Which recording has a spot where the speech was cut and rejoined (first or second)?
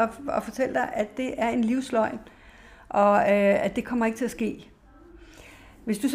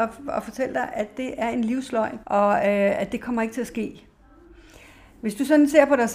second